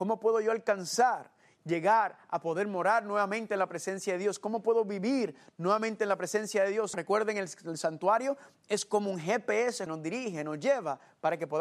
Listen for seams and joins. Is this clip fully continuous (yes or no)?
no